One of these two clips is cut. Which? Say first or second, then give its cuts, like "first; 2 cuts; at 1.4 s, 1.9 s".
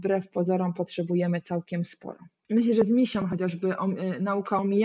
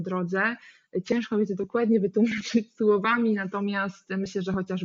first; 1 cut; at 2.4 s